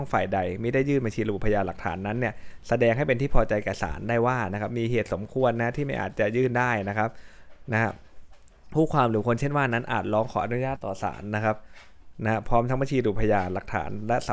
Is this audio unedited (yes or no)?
no